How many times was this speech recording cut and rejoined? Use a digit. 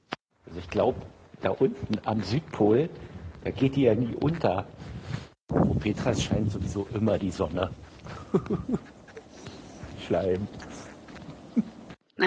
0